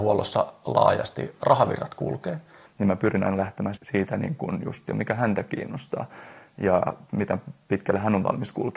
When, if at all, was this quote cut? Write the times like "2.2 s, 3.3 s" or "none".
2.7 s, 3.8 s, 4.9 s

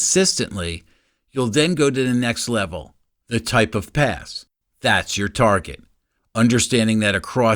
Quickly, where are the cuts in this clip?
4.6 s, 6.2 s

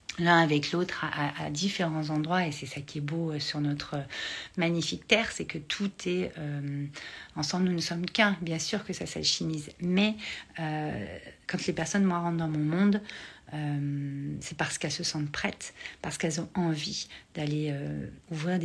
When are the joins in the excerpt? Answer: 11.4 s

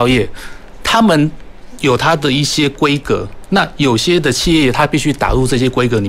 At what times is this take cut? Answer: none

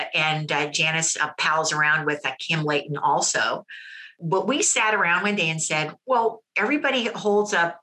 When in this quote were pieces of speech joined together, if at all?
none

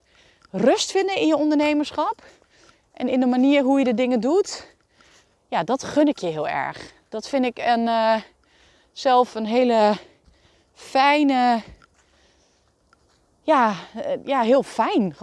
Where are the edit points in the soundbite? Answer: none

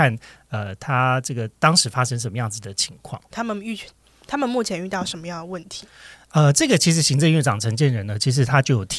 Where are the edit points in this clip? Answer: 3.3 s

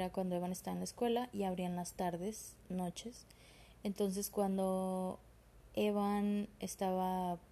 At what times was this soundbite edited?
none

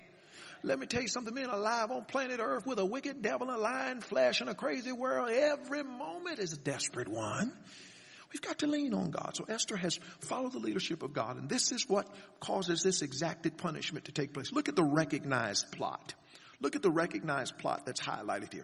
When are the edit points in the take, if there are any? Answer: none

